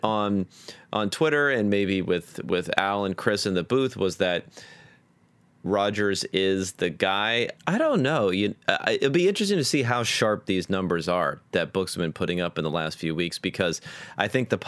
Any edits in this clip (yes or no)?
yes